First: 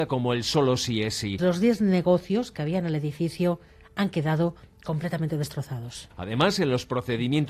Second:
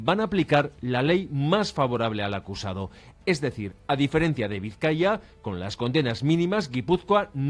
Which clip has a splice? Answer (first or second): first